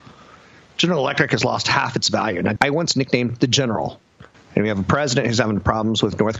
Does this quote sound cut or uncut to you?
cut